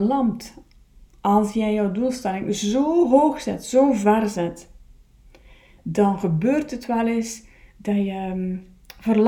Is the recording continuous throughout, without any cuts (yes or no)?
yes